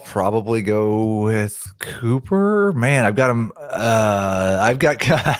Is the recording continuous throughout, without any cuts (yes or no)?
yes